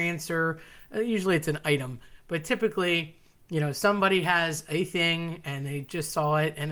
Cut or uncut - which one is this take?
uncut